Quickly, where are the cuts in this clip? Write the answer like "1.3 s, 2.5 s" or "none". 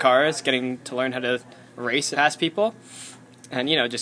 2.1 s